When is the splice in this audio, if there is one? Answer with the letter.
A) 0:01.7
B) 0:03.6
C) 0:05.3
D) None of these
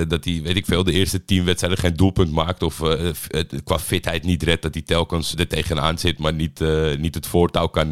C